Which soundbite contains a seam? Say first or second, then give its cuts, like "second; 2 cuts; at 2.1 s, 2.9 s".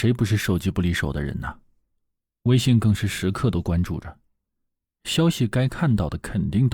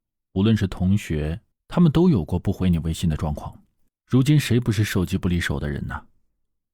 second; 2 cuts; at 1.5 s, 3.9 s